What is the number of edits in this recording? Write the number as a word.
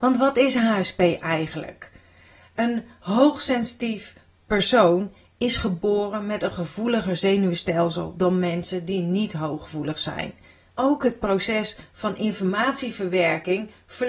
one